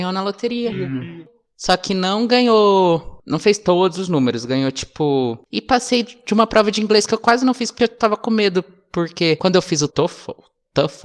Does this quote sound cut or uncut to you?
cut